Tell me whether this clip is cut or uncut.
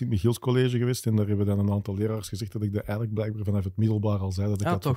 uncut